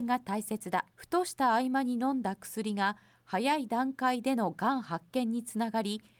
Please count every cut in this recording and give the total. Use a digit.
1